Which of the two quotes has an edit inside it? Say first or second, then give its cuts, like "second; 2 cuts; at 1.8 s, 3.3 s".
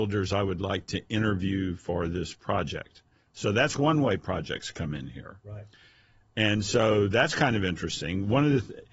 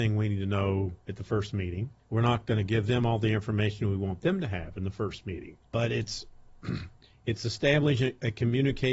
second; 2 cuts; at 2.0 s, 5.7 s